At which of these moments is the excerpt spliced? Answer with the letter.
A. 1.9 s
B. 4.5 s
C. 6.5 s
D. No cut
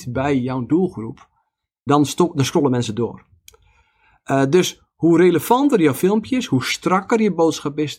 A